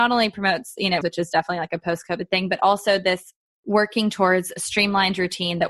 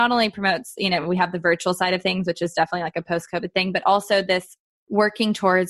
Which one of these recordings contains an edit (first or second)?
first